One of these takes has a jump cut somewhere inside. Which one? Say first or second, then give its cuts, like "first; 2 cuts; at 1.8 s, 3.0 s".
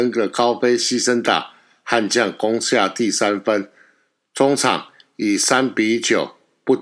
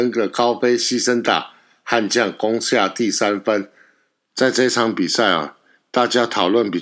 second; 1 cut; at 4.3 s